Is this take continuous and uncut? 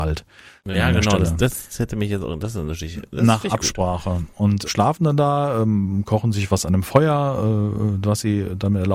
no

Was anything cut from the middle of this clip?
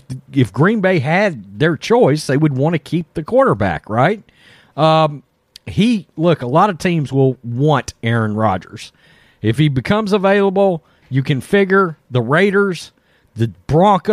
no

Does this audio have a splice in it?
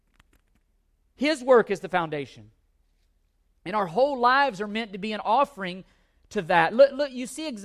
no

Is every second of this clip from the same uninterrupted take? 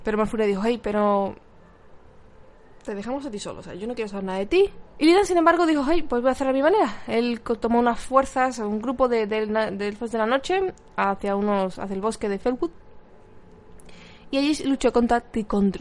no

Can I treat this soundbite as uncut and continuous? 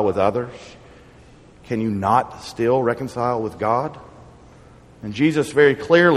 yes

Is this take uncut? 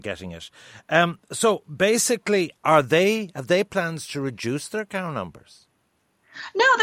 yes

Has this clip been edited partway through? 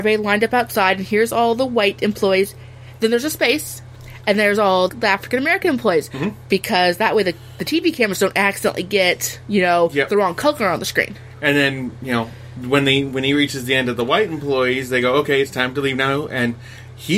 yes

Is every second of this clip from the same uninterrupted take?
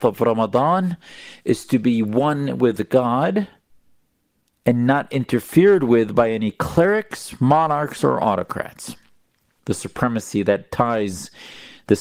no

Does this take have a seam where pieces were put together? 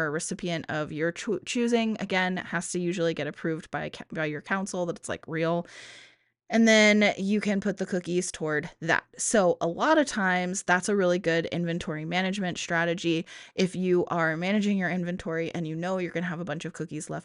no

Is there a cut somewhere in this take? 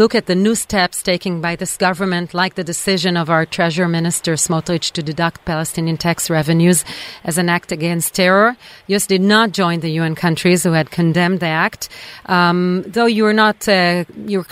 no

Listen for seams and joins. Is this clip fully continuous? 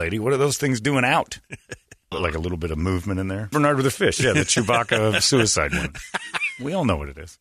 no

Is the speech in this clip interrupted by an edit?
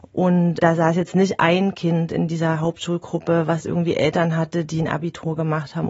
no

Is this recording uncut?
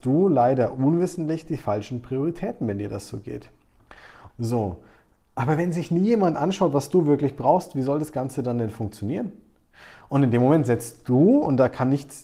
no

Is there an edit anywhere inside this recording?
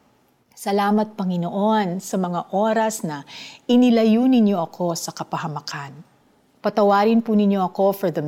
no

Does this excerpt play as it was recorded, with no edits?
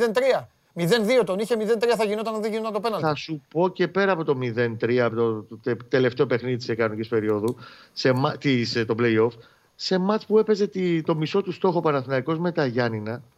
yes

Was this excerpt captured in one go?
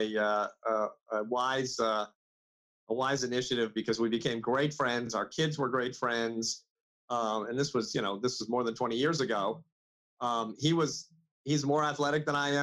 yes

